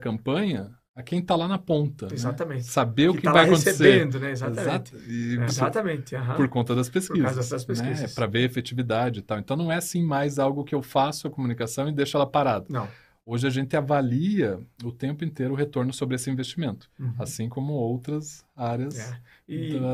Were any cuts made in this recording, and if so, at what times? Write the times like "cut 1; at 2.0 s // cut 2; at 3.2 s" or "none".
cut 1; at 5.5 s